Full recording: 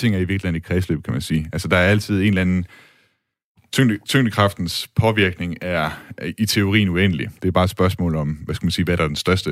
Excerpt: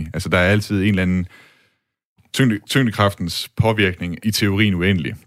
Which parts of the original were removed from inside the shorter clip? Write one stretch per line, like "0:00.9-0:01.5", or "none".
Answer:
0:05.6-0:06.3